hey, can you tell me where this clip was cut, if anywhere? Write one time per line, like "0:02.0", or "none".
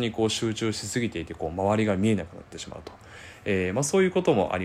none